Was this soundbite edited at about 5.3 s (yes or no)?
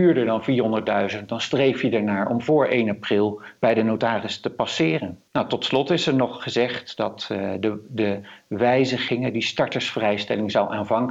yes